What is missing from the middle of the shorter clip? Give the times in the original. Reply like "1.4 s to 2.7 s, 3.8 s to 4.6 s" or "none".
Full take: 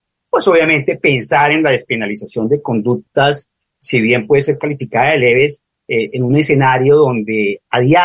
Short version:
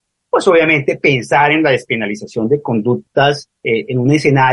3.6 s to 5.8 s